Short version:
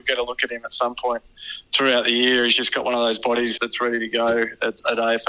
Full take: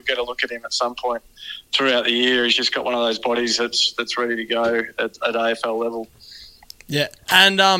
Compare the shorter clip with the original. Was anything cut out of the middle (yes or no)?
yes